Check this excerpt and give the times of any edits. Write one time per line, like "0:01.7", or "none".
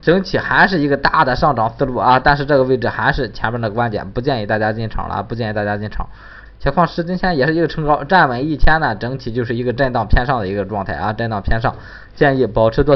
0:06.5

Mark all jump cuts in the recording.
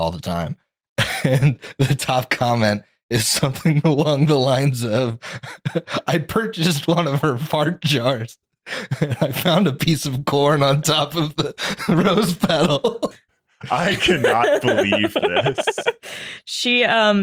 0:13.1

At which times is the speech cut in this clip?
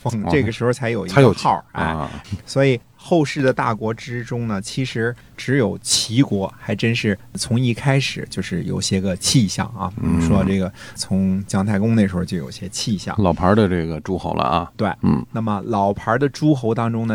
0:02.2

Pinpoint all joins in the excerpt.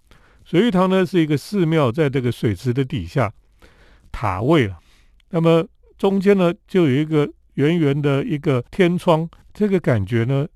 0:04.0
0:09.4

